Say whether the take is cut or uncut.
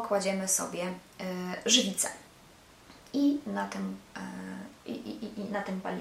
uncut